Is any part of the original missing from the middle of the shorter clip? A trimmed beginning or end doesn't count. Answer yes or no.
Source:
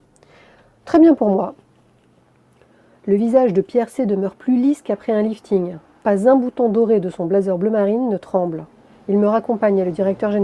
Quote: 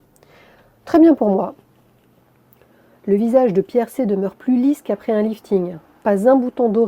no